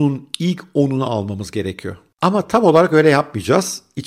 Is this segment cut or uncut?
uncut